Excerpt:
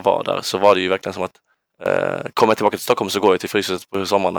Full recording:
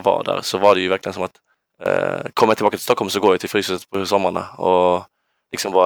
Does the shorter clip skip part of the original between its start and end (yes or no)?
no